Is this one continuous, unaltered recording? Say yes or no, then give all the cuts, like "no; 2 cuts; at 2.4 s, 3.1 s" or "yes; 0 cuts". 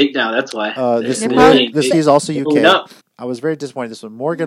no; 2 cuts; at 1.9 s, 3.0 s